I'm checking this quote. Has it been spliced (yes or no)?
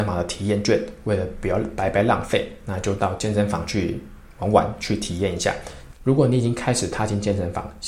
yes